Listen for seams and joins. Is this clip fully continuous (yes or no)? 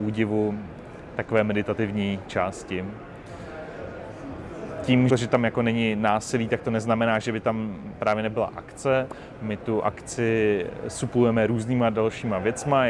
no